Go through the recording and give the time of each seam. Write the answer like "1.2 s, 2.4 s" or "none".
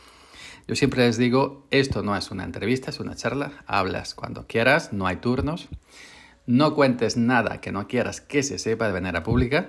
none